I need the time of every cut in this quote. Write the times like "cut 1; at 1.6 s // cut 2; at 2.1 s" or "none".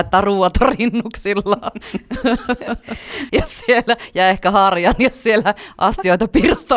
cut 1; at 3.3 s